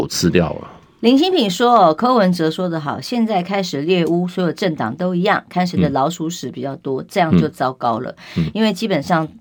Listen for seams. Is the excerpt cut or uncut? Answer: uncut